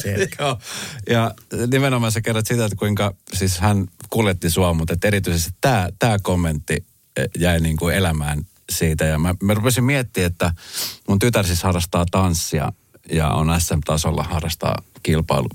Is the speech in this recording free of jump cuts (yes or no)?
yes